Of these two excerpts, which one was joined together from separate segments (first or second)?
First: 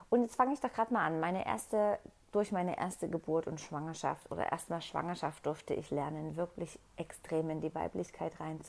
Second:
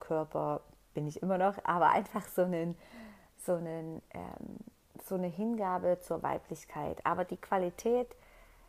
second